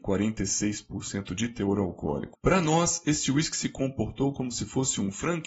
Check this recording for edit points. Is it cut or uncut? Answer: uncut